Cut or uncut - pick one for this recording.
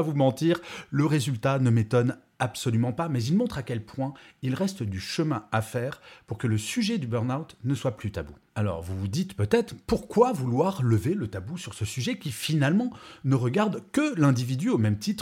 uncut